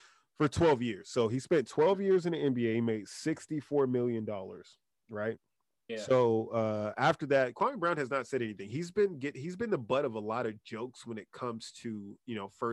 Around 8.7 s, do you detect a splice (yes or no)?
no